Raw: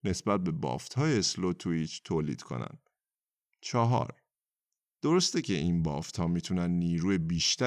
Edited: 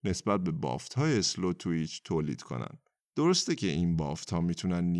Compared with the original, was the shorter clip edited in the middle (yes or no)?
yes